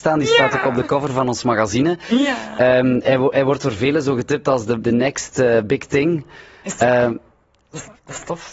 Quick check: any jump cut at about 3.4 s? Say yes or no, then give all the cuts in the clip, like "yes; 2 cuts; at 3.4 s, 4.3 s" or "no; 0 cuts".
no; 1 cut; at 4.8 s